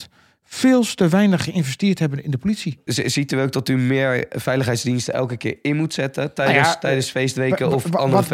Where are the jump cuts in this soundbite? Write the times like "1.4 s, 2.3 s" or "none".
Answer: none

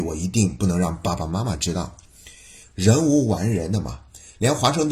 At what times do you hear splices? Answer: 2.6 s

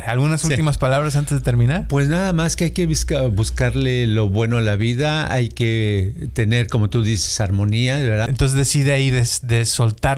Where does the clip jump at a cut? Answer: 8.3 s

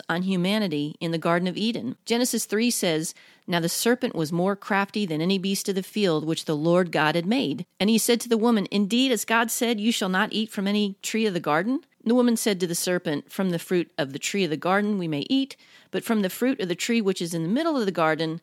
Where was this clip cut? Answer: none

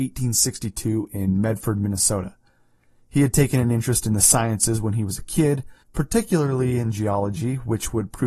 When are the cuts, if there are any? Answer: 5.8 s

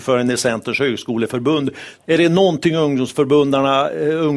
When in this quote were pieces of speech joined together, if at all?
2.0 s

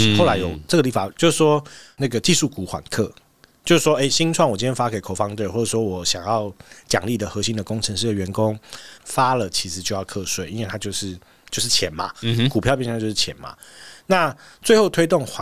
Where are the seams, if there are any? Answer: 1.1 s, 9.0 s

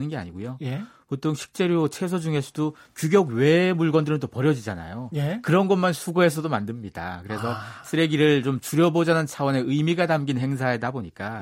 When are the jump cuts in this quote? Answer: none

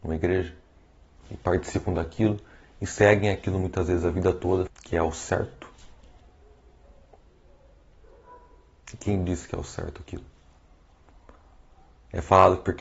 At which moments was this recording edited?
4.7 s

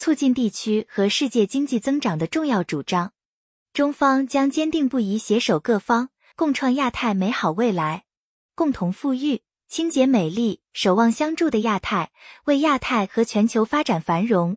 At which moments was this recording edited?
6.3 s, 8.5 s

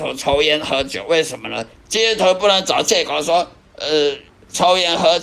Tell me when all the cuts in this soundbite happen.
1.8 s

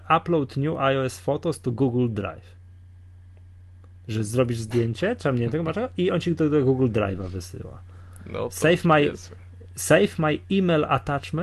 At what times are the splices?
none

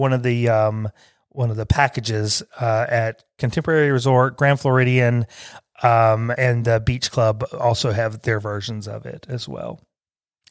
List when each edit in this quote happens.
6.4 s

